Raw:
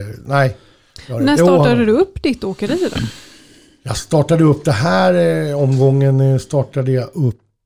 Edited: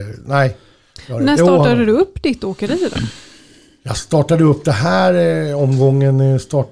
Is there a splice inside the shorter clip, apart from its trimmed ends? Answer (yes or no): no